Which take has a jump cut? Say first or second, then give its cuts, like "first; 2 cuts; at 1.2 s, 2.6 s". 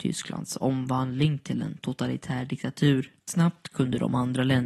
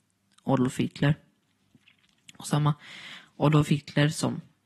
first; 1 cut; at 3.2 s